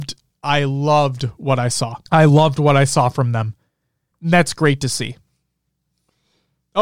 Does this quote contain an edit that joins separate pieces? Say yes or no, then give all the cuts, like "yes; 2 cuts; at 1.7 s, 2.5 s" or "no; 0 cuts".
yes; 2 cuts; at 2.1 s, 4.1 s